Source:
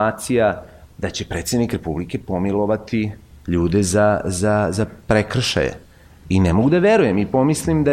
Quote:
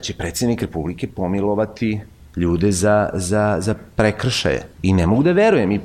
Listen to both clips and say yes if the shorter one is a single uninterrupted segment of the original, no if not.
no